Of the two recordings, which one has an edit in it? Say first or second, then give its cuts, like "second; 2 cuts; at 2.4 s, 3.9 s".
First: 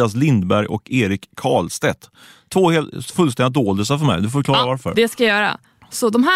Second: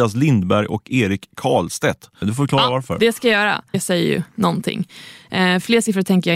second; 2 cuts; at 2.2 s, 3.7 s